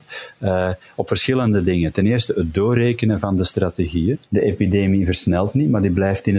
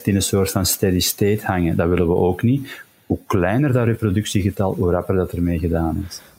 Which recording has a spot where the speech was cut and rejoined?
first; 1 cut; at 4.3 s

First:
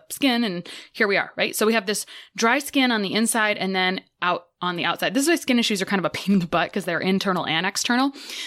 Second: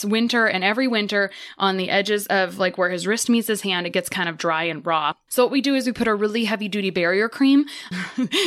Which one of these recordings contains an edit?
second; 1 cut; at 5.3 s

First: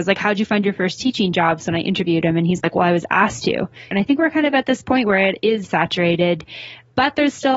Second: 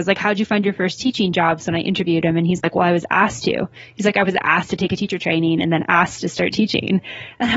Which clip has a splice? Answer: first; 2 cuts; at 3.9 s, 5.6 s

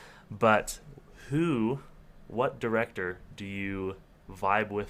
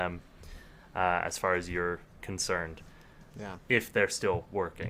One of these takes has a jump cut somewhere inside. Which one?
second; 1 cut; at 3.3 s

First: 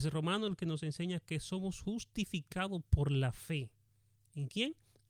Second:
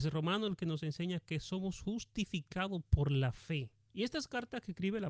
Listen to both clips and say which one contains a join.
second; 1 cut; at 3.9 s

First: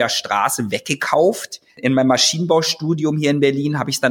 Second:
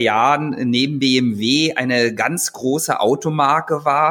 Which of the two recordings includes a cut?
first; 1 cut; at 1.7 s

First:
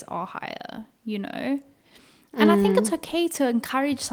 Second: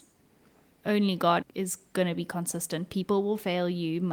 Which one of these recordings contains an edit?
second; 1 cut; at 1.4 s

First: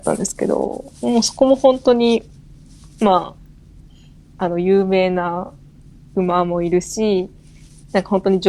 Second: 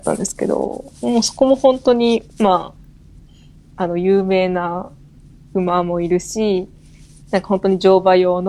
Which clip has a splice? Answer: second; 1 cut; at 2.3 s

